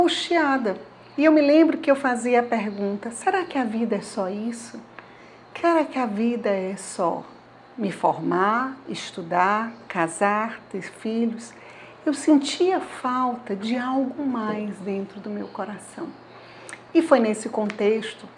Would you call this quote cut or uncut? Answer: uncut